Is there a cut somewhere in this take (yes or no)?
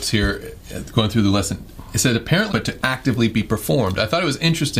yes